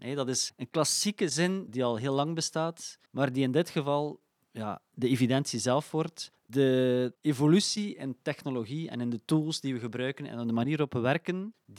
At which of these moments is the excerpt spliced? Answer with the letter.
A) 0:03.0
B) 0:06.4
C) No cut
B